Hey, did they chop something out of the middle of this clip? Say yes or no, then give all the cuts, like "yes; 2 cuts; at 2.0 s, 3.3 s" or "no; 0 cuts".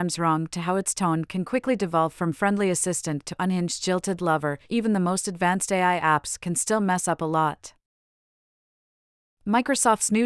no; 0 cuts